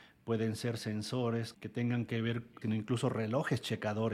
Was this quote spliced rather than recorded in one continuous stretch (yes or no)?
yes